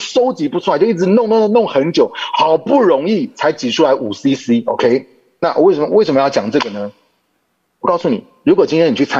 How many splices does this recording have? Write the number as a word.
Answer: zero